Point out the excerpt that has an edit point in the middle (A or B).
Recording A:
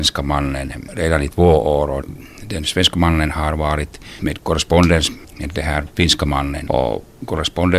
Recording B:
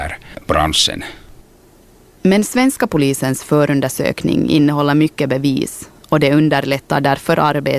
A